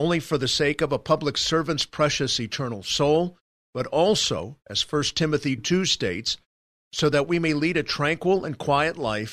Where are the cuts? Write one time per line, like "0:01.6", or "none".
0:05.6